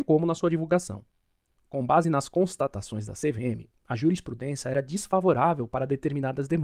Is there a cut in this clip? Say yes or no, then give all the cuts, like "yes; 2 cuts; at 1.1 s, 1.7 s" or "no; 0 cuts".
yes; 1 cut; at 1.5 s